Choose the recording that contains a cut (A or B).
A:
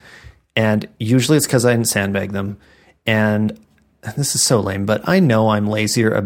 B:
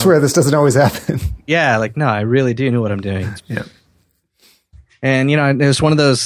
B